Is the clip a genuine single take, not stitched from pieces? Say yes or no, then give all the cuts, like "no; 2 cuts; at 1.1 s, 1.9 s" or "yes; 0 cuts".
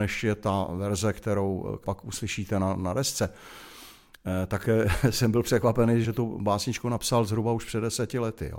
no; 1 cut; at 6.0 s